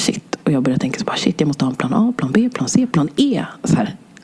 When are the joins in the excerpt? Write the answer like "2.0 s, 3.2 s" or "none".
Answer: 2.9 s